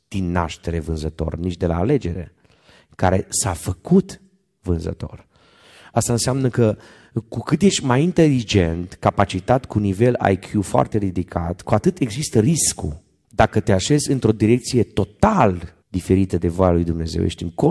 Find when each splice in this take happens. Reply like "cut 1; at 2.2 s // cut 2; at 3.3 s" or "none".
cut 1; at 13.2 s // cut 2; at 15.8 s